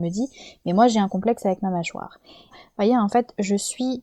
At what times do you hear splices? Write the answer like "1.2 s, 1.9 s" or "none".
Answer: 2.5 s